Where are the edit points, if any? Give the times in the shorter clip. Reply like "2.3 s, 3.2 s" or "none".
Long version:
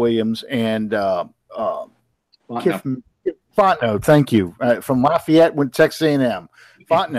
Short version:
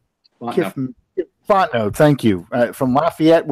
none